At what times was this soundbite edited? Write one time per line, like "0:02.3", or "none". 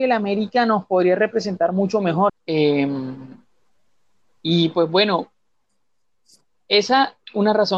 0:02.3